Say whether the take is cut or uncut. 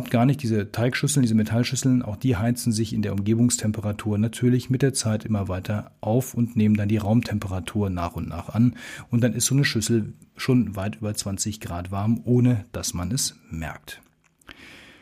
uncut